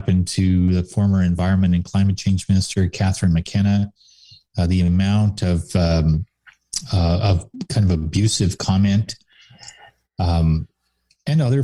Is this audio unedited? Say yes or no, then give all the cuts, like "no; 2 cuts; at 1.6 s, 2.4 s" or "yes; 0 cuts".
yes; 0 cuts